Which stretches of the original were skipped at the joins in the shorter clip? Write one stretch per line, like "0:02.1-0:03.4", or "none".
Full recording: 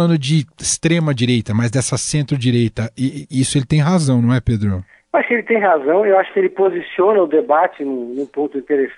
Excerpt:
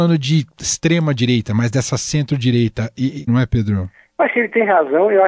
0:03.3-0:04.2